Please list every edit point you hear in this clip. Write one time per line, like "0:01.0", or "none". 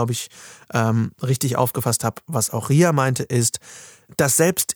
none